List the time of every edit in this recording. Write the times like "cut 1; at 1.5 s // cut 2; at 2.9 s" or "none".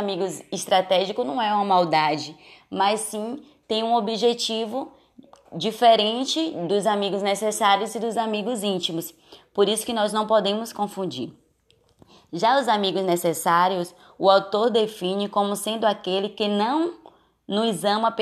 none